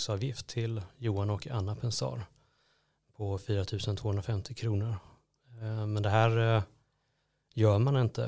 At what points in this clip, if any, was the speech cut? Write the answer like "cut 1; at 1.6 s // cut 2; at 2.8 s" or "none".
none

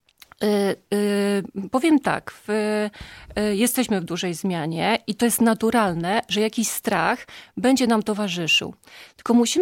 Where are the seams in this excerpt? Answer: none

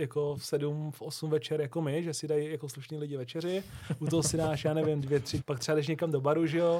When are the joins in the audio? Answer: cut 1; at 5.4 s

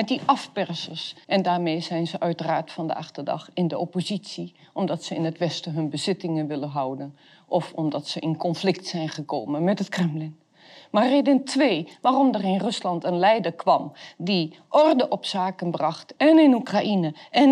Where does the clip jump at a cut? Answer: cut 1; at 1.2 s // cut 2; at 16.2 s

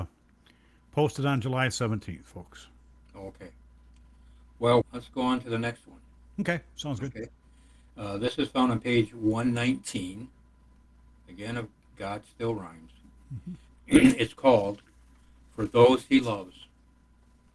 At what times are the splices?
cut 1; at 4.8 s

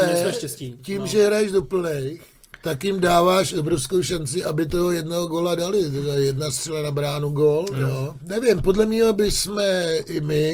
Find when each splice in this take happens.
cut 1; at 8.2 s

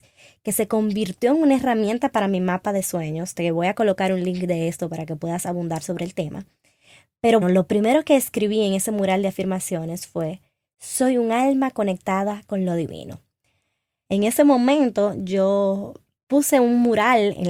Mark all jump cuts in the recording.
cut 1; at 7.4 s // cut 2; at 14.1 s

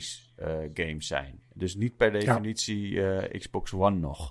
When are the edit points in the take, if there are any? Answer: none

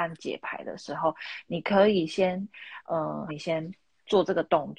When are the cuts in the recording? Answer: cut 1; at 3.3 s

